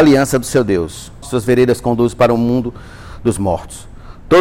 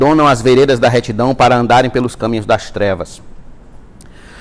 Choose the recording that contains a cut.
first; 1 cut; at 1.2 s

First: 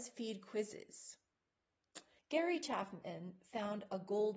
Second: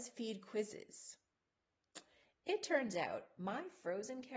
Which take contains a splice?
first; 1 cut; at 2.2 s

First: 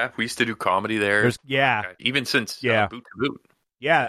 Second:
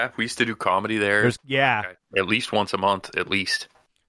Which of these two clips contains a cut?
first; 1 cut; at 2.0 s

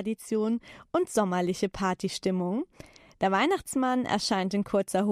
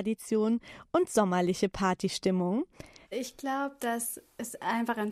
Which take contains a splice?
second; 1 cut; at 3.0 s

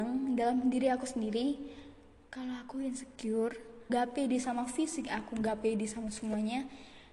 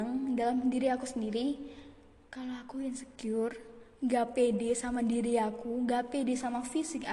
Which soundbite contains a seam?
first; 1 cut; at 3.9 s

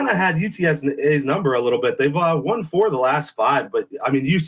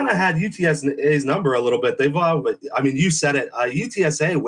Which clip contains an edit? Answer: second; 1 cut; at 2.4 s

